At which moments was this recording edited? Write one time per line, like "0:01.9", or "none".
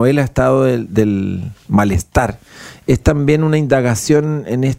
none